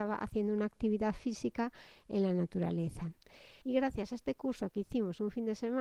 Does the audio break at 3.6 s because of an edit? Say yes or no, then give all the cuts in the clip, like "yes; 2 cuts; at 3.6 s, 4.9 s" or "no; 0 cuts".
yes; 1 cut; at 3.6 s